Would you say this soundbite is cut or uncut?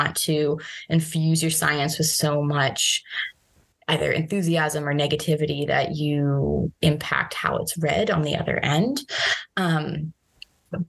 uncut